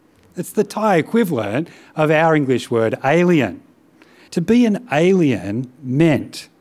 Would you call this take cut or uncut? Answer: cut